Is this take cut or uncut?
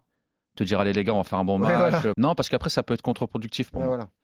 cut